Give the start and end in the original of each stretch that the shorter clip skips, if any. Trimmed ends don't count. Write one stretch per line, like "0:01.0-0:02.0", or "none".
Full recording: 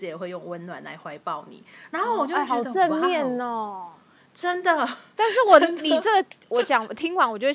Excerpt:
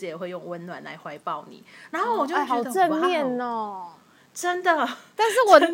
none